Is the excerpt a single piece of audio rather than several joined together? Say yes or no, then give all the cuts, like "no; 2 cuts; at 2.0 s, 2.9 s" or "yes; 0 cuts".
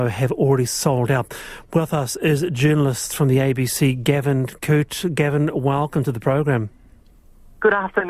yes; 0 cuts